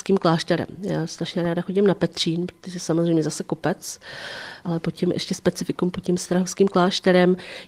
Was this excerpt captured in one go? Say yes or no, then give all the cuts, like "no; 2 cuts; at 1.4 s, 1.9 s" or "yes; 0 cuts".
no; 1 cut; at 4.6 s